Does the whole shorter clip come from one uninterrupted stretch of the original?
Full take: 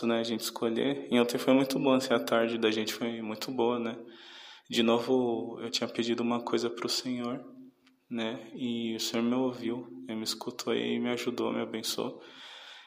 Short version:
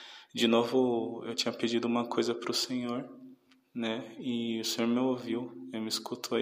yes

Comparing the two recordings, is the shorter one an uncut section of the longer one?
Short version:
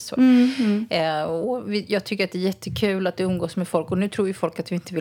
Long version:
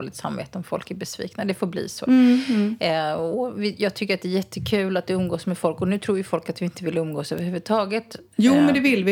yes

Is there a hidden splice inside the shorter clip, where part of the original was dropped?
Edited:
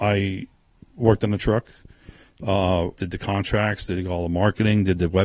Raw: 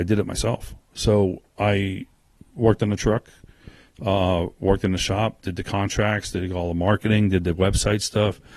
yes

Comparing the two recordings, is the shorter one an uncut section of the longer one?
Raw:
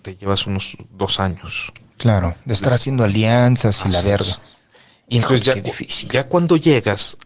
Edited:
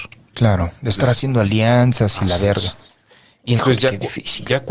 yes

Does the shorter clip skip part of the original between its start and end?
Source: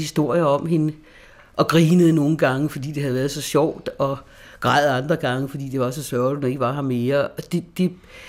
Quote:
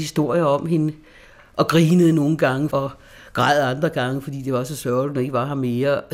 yes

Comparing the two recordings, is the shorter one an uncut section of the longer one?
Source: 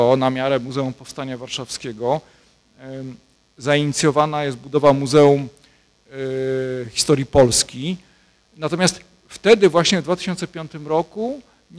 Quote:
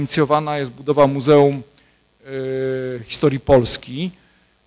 yes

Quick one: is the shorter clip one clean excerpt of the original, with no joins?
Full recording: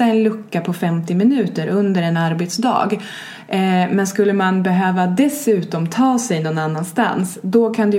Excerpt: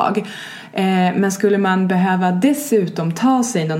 yes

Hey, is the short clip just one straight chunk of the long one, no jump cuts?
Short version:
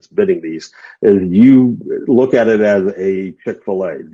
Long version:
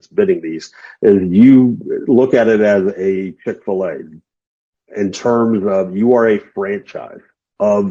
yes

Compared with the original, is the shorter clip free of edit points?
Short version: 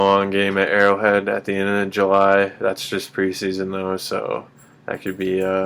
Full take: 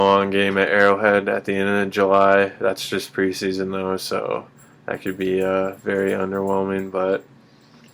yes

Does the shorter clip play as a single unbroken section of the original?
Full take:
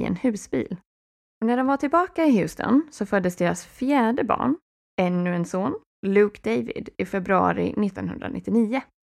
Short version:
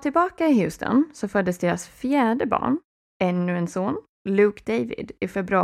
yes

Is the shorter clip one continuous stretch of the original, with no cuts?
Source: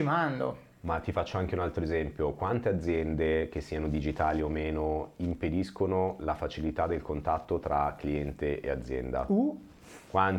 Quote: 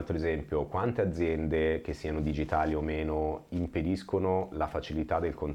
yes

